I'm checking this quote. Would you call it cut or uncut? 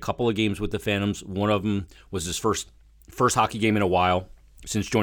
uncut